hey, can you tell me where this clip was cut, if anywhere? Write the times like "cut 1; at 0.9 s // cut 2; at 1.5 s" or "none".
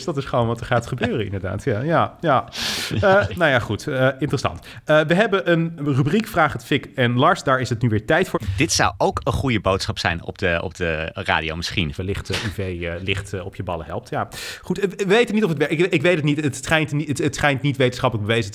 cut 1; at 3.3 s // cut 2; at 8.3 s // cut 3; at 12.0 s

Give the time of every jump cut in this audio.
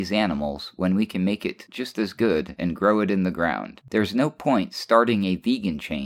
cut 1; at 3.9 s

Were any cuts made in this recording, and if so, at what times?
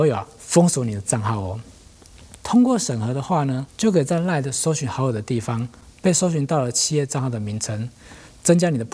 cut 1; at 2.4 s // cut 2; at 3.7 s

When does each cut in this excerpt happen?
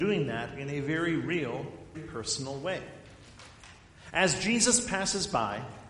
cut 1; at 1.9 s

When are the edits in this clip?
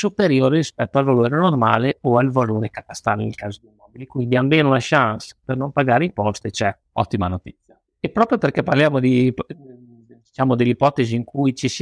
none

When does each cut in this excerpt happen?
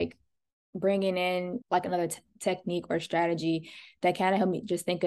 cut 1; at 1.6 s

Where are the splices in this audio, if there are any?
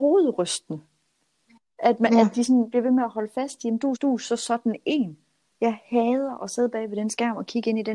cut 1; at 4.0 s // cut 2; at 5.5 s

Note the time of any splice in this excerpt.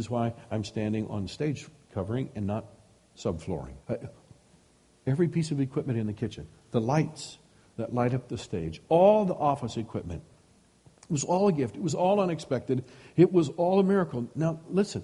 cut 1; at 3.8 s

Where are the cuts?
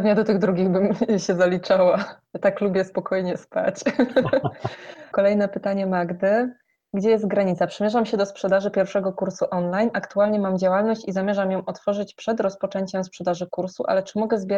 cut 1; at 5.1 s

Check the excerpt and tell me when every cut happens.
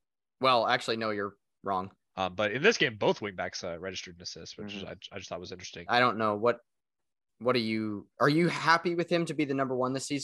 cut 1; at 2.1 s // cut 2; at 5.9 s

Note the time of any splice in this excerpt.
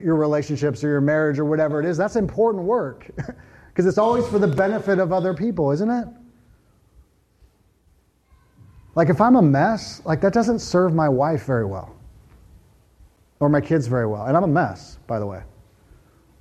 none

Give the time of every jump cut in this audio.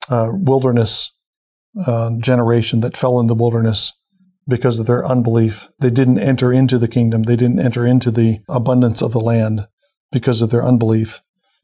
cut 1; at 5.7 s

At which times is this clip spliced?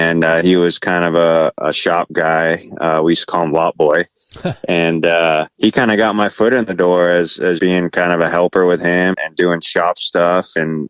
cut 1; at 5.5 s // cut 2; at 7.6 s // cut 3; at 9.1 s

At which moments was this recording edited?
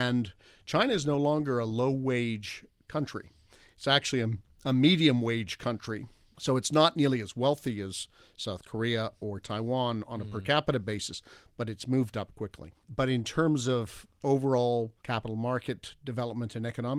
cut 1; at 12.8 s // cut 2; at 15.0 s

